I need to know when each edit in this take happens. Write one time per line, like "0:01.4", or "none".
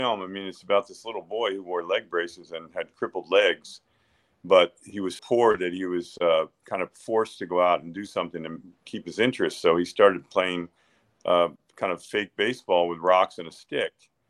0:05.2